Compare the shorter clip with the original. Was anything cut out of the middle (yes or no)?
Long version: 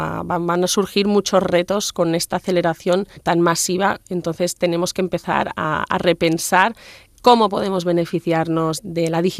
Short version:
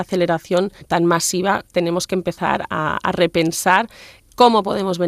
yes